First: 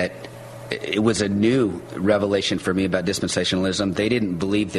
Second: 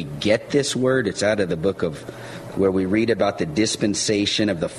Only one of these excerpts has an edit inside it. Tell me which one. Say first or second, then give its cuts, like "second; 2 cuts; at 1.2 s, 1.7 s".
second; 2 cuts; at 1.5 s, 2.5 s